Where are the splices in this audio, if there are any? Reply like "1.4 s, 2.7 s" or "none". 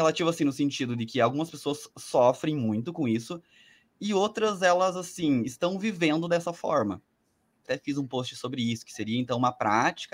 7.6 s